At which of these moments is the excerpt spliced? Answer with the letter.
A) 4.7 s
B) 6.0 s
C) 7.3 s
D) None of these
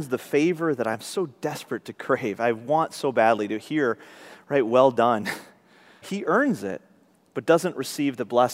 B